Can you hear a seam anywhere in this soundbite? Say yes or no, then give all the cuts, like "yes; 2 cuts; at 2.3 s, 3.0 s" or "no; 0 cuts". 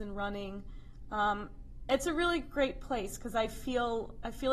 no; 0 cuts